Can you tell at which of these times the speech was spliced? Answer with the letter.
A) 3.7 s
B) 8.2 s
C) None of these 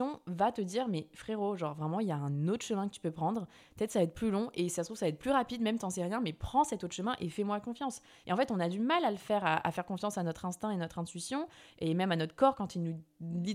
C